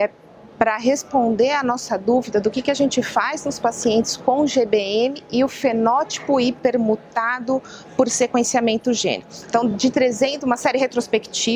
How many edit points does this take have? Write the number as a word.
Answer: zero